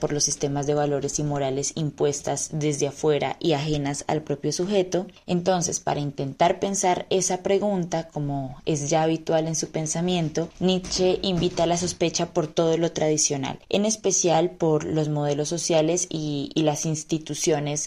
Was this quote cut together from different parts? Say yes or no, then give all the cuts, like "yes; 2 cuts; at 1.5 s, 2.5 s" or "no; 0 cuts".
no; 0 cuts